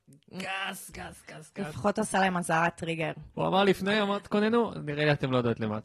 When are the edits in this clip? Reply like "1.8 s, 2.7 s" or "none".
0.9 s, 3.3 s